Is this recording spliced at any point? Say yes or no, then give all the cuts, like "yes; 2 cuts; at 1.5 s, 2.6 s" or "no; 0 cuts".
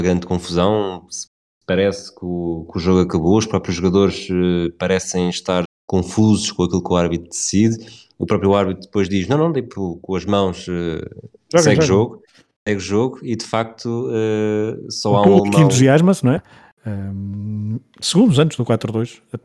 yes; 2 cuts; at 5.7 s, 16.4 s